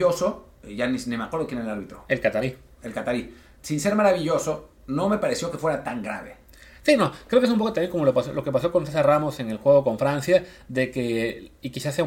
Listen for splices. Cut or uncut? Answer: uncut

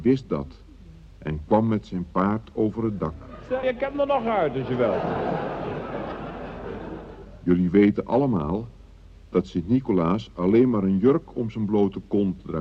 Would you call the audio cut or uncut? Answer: cut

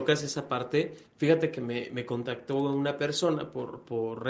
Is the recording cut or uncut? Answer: cut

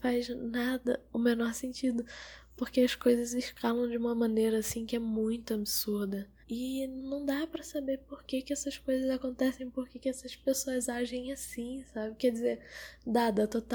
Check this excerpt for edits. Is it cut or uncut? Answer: cut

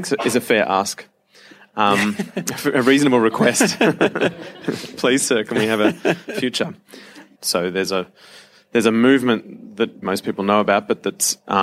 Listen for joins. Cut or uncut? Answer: cut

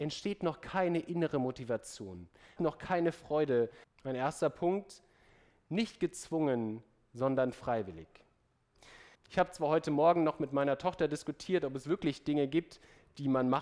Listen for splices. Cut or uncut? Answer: cut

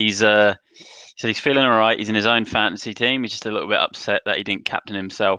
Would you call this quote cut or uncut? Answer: uncut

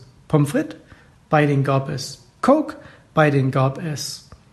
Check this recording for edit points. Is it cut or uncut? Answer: uncut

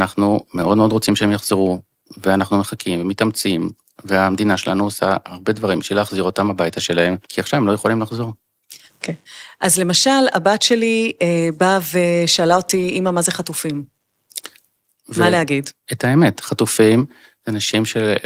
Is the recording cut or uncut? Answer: cut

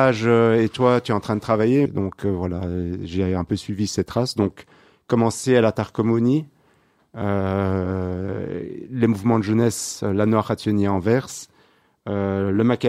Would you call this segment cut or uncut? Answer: cut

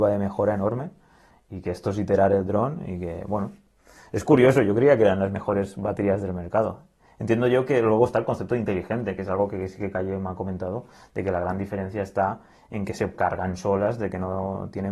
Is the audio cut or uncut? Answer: uncut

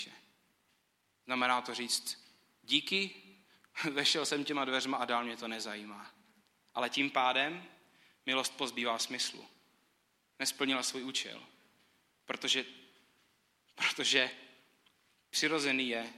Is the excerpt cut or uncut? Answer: uncut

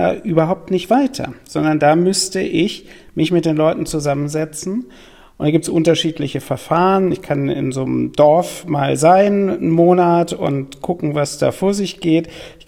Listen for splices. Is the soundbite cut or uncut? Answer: uncut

